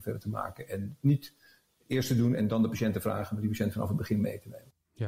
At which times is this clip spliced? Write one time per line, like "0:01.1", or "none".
none